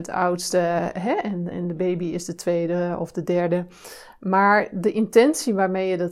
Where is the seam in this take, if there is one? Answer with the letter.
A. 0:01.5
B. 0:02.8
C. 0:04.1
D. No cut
A